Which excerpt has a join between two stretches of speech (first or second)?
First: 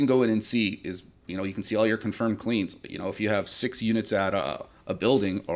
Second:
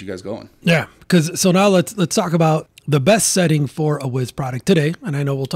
second